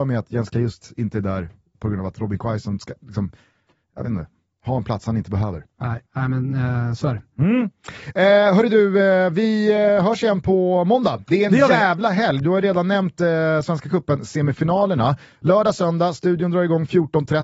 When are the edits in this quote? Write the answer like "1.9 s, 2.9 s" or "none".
1.7 s, 6.1 s